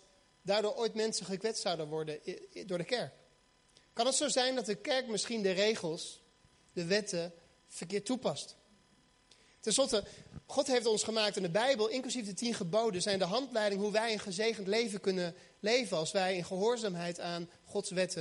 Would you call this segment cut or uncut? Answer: uncut